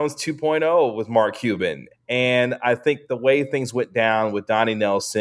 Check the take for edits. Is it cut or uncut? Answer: cut